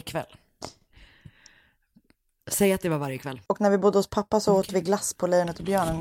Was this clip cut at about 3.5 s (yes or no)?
yes